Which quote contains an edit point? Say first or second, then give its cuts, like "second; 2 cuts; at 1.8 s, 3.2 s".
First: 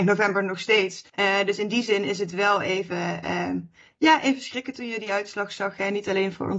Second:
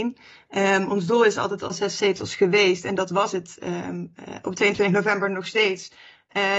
first; 1 cut; at 1.1 s